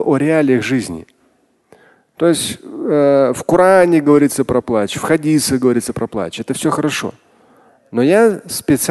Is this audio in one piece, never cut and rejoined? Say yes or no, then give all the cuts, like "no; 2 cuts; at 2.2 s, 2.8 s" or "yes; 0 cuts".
yes; 0 cuts